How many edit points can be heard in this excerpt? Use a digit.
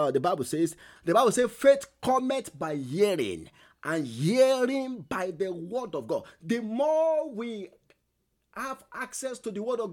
1